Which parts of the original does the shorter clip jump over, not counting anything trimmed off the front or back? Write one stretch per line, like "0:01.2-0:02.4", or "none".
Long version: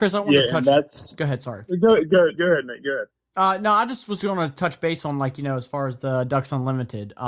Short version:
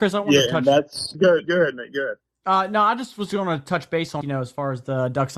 0:01.1-0:02.1
0:05.1-0:05.4